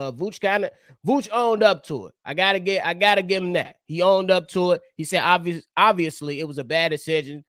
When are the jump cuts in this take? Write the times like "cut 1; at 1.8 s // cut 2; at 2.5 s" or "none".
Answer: none